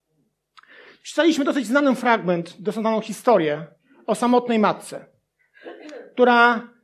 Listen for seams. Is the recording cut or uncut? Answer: uncut